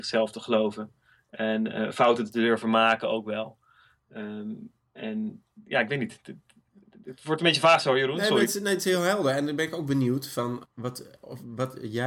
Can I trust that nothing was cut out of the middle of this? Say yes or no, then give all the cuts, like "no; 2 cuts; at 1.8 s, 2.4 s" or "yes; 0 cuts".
no; 1 cut; at 10.6 s